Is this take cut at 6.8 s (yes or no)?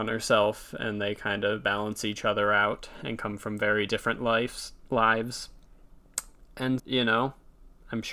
yes